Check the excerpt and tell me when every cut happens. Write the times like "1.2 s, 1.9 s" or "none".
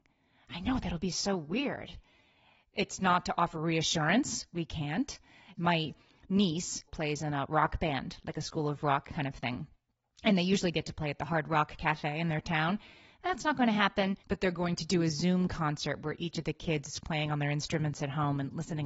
5.6 s, 6.9 s, 14.2 s